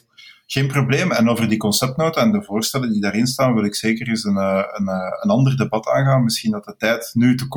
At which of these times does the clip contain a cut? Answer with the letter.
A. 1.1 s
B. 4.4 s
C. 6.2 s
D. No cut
D